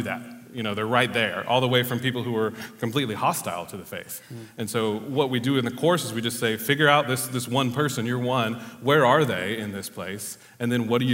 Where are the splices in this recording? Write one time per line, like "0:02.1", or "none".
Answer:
none